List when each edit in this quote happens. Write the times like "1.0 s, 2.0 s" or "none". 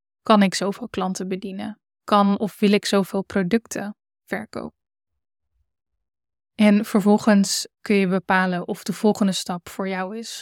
7.7 s